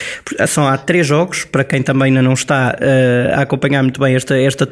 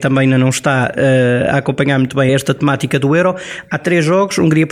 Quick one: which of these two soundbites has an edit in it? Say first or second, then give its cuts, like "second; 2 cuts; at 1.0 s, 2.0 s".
second; 1 cut; at 2.3 s